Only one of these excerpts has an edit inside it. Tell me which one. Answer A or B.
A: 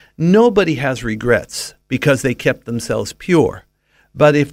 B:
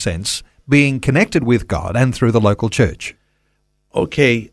A